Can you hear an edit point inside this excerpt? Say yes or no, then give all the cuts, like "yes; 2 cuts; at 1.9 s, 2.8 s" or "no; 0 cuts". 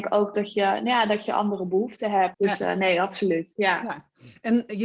yes; 1 cut; at 2.3 s